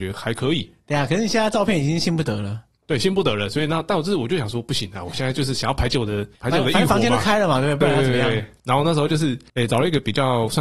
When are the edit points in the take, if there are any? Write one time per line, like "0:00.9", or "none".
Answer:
none